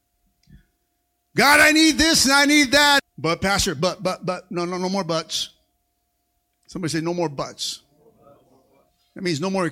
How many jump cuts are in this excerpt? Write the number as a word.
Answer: one